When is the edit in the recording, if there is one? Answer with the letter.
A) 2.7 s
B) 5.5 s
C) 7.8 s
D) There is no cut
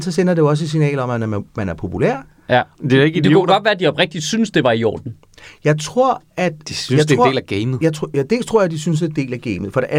A